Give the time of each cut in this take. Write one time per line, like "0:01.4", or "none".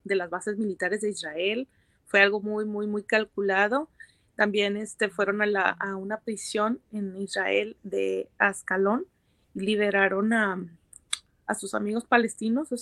none